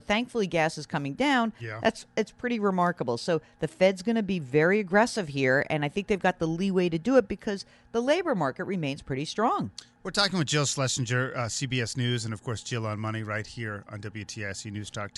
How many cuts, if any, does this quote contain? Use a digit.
1